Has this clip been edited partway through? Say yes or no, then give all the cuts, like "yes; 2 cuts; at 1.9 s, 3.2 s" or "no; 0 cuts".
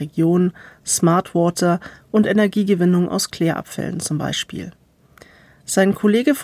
no; 0 cuts